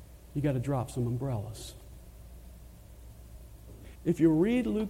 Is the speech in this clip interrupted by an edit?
yes; 1 cut; at 3.9 s

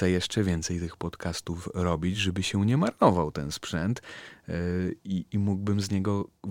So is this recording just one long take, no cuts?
yes; 0 cuts

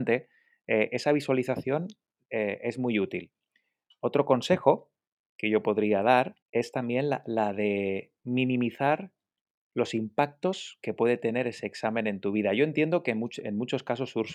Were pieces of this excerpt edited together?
yes; 1 cut; at 6.4 s

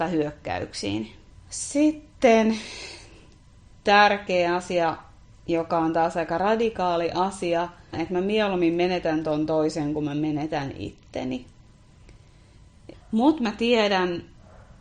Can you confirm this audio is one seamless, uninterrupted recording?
no; 3 cuts; at 1.3 s, 7.9 s, 12.9 s

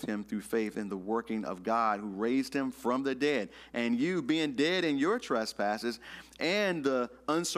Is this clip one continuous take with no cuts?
yes; 0 cuts

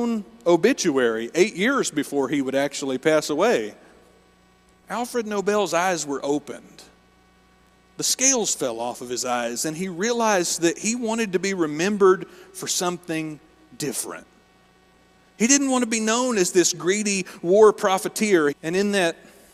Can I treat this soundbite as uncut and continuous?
no; 1 cut; at 18.5 s

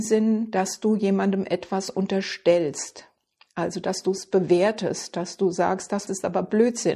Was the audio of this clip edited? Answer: yes; 1 cut; at 6.1 s

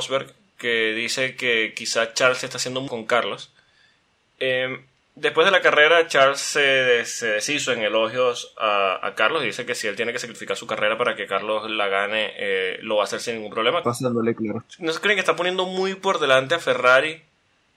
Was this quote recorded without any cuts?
no; 2 cuts; at 2.9 s, 13.8 s

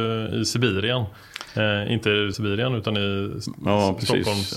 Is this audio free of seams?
no; 1 cut; at 2.3 s

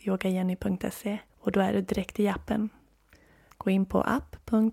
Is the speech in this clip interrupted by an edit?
yes; 2 cuts; at 1.3 s, 3.5 s

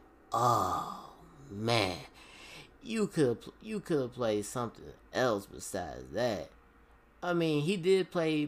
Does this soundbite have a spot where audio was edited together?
no; 0 cuts

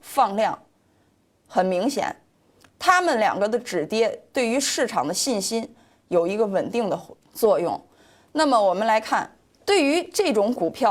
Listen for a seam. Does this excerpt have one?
no; 0 cuts

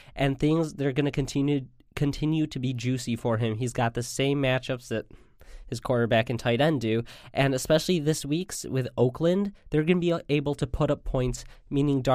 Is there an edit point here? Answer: no; 0 cuts

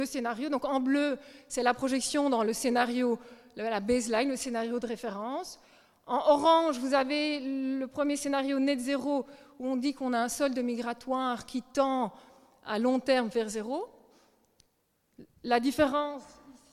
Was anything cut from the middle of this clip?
no; 0 cuts

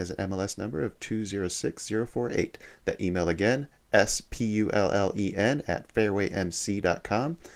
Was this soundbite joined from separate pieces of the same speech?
no; 0 cuts

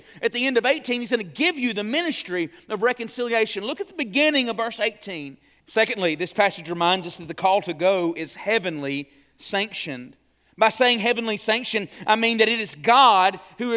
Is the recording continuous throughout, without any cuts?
no; 1 cut; at 5.6 s

